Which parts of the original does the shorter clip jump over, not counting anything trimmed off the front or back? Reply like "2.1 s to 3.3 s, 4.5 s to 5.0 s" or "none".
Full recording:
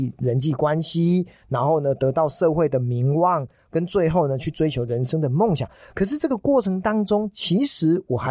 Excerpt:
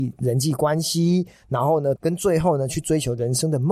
2.0 s to 3.7 s